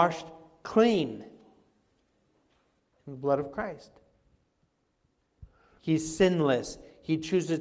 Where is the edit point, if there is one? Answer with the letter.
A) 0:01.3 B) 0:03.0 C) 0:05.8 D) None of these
C